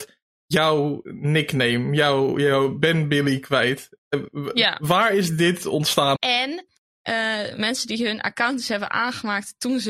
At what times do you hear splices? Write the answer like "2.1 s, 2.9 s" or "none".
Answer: 6.2 s